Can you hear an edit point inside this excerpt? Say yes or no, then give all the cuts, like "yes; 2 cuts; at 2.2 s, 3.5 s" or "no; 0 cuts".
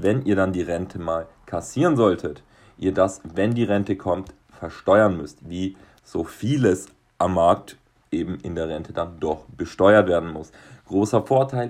no; 0 cuts